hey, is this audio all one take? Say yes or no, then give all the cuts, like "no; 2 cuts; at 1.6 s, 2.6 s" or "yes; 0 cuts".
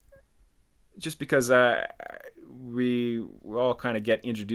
yes; 0 cuts